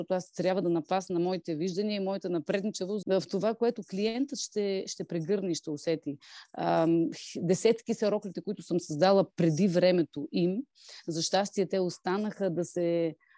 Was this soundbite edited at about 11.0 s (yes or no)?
no